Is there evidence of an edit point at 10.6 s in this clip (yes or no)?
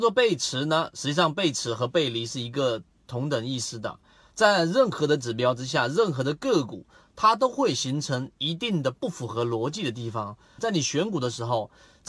yes